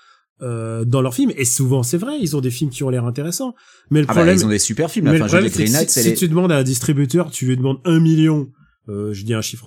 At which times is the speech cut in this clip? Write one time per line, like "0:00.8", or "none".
none